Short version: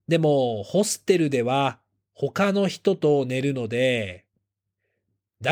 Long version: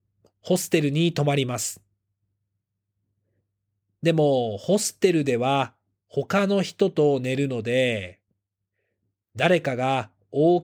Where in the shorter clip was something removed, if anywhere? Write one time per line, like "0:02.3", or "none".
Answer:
none